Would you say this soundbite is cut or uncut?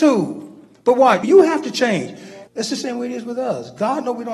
cut